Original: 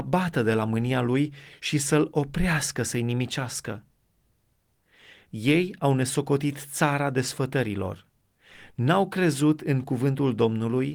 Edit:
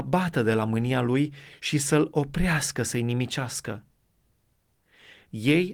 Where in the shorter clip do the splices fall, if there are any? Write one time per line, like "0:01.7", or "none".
none

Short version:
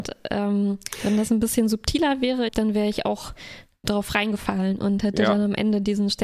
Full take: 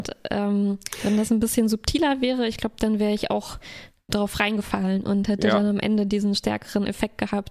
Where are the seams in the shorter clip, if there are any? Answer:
0:02.5

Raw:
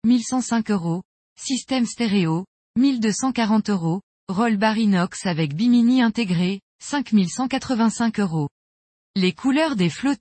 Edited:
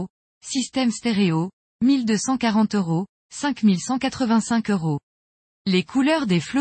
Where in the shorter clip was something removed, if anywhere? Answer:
0:03.2

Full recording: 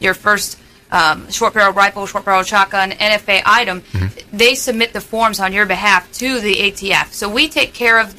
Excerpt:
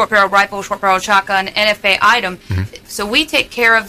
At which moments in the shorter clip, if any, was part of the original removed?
0:02.8

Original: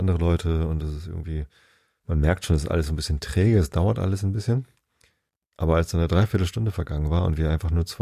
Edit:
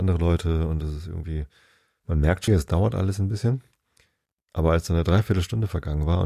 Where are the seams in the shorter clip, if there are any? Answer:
0:02.5

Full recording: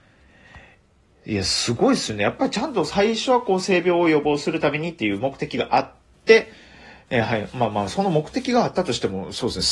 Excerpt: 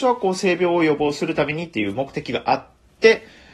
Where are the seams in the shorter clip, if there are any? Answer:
none

